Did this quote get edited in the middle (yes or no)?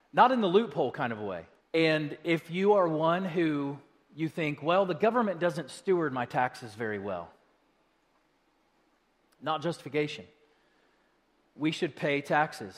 yes